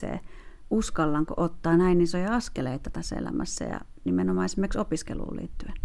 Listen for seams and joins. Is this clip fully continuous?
yes; 0 cuts

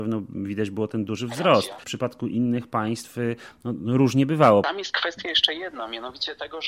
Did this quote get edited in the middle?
no; 0 cuts

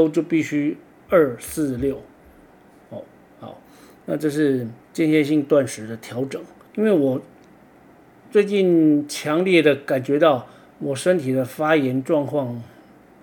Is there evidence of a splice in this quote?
yes; 2 cuts; at 4.8 s, 6.7 s

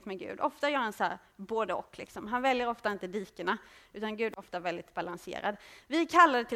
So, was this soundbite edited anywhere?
no; 0 cuts

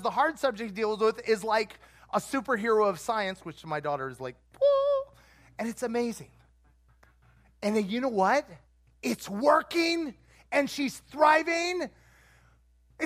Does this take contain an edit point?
no; 0 cuts

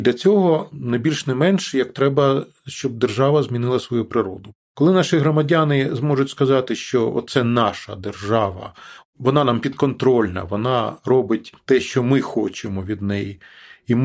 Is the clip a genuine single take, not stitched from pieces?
yes; 0 cuts

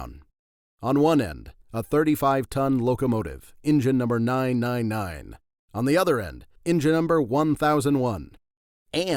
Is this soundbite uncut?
no; 1 cut; at 6.6 s

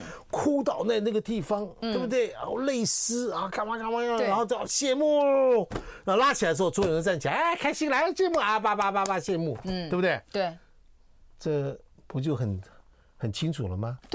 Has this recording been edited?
no; 0 cuts

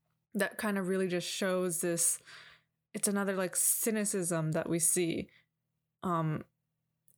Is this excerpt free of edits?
yes; 0 cuts

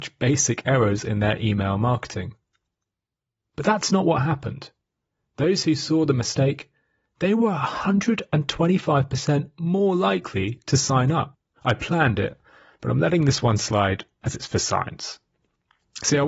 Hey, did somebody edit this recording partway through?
yes; 1 cut; at 11.6 s

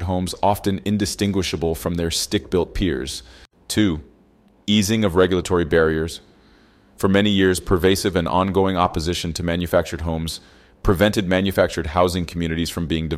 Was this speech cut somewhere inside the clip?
no; 0 cuts

